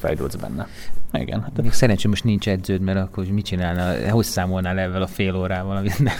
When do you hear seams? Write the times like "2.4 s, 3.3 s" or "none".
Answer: 1.1 s